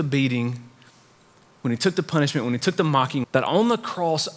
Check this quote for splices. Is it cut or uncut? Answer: cut